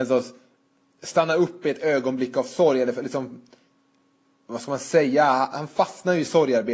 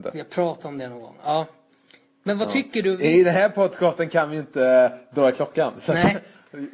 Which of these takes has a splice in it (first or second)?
first